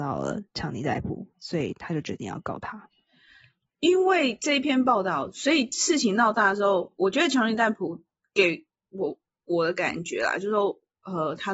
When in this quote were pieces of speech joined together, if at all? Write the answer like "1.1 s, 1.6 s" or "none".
none